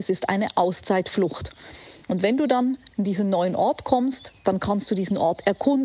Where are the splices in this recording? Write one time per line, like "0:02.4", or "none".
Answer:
none